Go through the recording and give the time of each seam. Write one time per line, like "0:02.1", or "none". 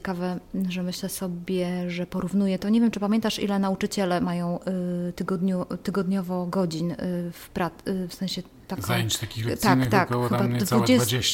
none